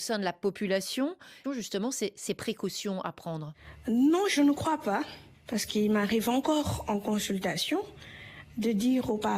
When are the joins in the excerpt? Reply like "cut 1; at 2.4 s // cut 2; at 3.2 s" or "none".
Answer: cut 1; at 1.4 s

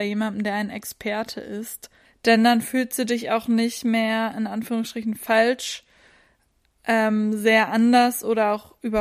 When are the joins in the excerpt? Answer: cut 1; at 2.1 s

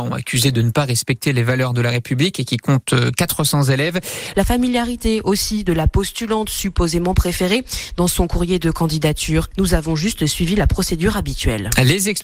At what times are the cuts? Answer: cut 1; at 4.3 s // cut 2; at 9.5 s

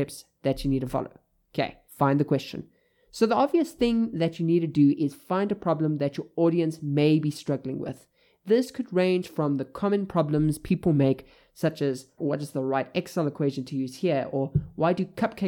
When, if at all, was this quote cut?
cut 1; at 1.9 s // cut 2; at 12.2 s

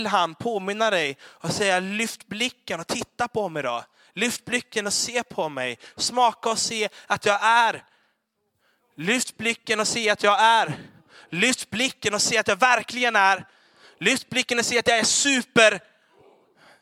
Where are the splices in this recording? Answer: none

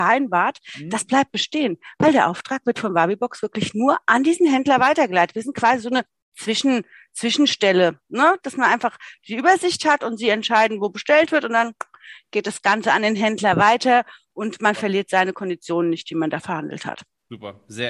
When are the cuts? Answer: none

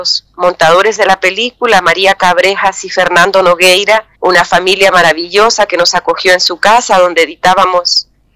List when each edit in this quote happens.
cut 1; at 4.1 s

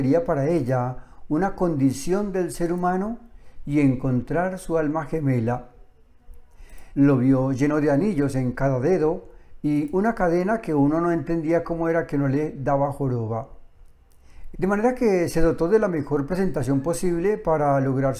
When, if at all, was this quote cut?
cut 1; at 6.9 s // cut 2; at 14.5 s

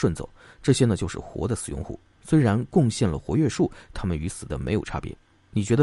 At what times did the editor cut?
cut 1; at 3.9 s

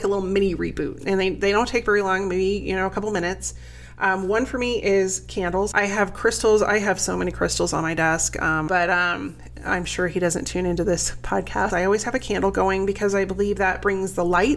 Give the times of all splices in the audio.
cut 1; at 5.7 s // cut 2; at 8.7 s // cut 3; at 11.7 s

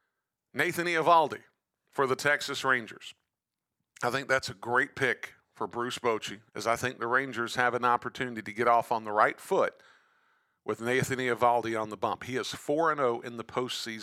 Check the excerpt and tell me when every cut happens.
cut 1; at 6.5 s

